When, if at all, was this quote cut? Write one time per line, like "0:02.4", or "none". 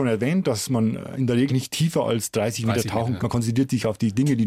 0:01.5
0:03.2